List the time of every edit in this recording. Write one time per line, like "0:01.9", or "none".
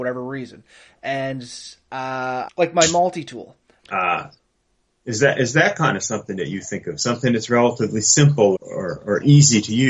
0:02.5
0:03.8
0:08.6